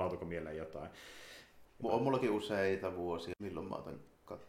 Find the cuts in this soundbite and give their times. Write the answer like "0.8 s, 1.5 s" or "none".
1.7 s, 3.3 s